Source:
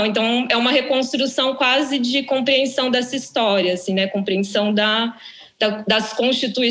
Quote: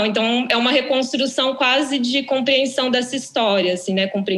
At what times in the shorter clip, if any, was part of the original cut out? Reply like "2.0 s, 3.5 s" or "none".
none